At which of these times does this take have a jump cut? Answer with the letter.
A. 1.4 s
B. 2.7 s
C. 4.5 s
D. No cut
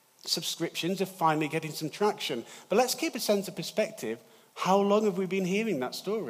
C